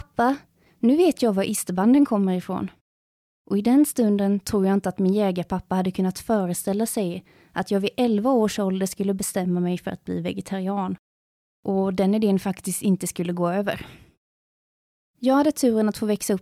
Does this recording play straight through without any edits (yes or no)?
yes